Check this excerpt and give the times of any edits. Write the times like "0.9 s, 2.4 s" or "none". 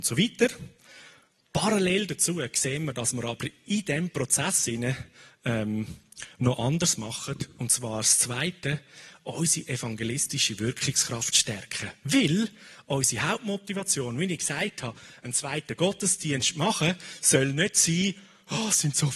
none